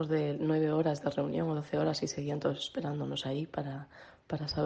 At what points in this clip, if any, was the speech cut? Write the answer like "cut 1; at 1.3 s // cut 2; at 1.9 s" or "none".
none